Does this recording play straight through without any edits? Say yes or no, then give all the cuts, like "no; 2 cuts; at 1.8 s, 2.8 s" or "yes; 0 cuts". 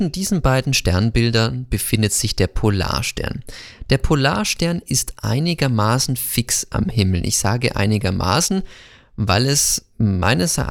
yes; 0 cuts